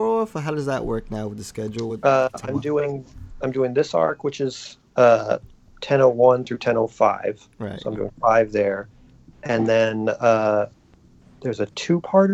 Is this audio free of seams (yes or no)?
yes